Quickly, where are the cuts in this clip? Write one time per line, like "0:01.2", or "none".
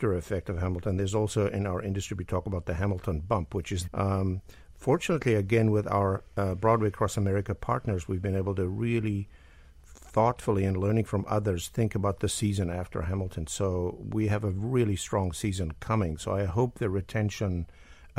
0:03.9